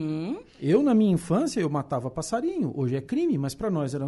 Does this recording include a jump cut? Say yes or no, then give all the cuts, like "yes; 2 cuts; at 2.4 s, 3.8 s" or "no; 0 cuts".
no; 0 cuts